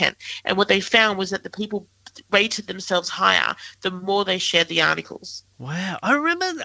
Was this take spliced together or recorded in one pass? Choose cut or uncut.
uncut